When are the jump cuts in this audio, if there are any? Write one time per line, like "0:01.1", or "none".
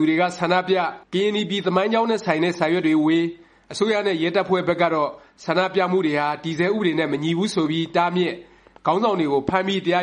0:01.0